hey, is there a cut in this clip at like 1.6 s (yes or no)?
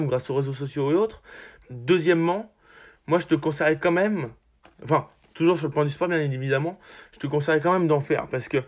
yes